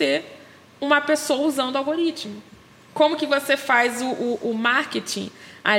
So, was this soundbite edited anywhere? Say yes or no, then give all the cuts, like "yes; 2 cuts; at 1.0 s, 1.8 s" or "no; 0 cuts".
no; 0 cuts